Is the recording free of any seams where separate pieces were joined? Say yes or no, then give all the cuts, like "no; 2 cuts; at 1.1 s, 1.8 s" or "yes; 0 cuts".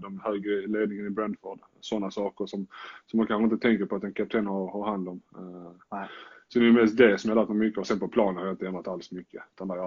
yes; 0 cuts